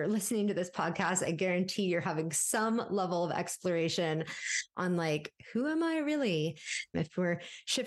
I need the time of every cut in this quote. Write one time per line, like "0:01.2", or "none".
0:06.9